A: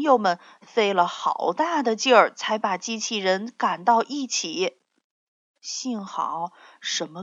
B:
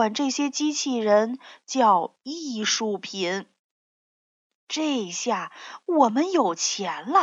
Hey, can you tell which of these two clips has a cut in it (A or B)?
A